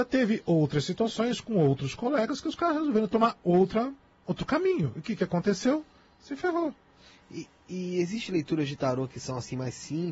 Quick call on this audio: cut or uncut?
uncut